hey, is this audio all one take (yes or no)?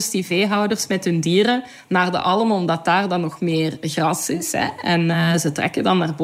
yes